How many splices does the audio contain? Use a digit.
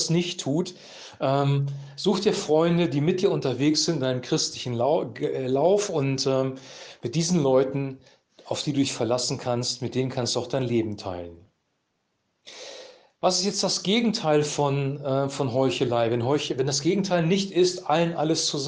0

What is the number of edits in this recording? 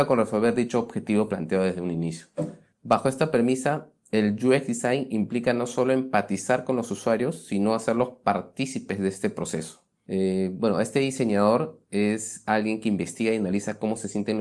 1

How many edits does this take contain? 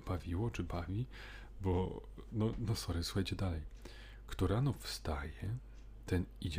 0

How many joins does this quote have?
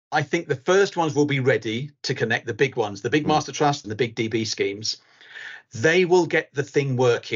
1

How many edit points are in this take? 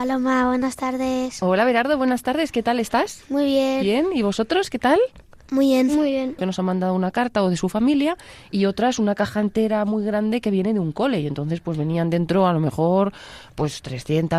1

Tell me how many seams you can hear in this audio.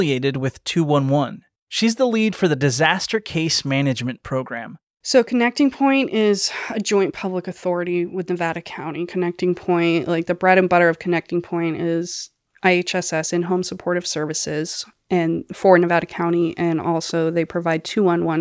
0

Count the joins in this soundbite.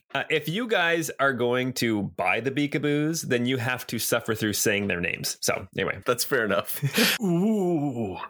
2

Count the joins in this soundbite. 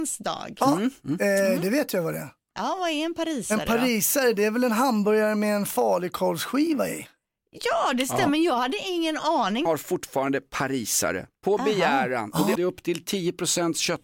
2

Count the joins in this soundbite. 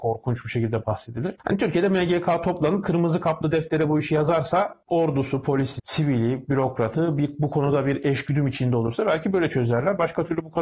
1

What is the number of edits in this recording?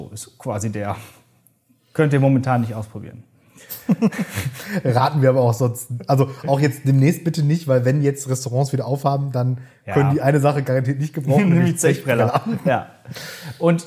0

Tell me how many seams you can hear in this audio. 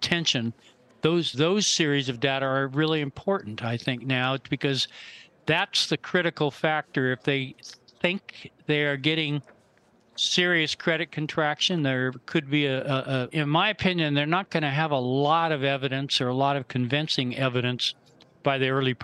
2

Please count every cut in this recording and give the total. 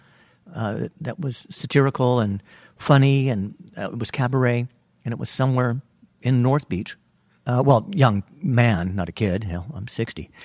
1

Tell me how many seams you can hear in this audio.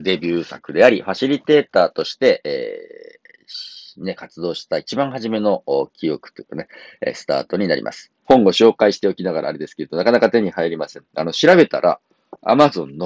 1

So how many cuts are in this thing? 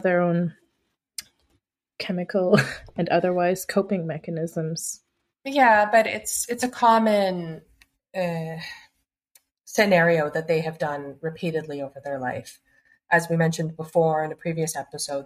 0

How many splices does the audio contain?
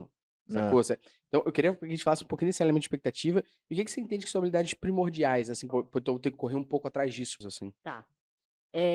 2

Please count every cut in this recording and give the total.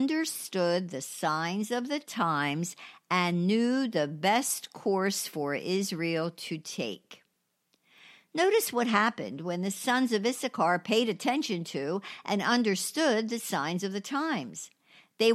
0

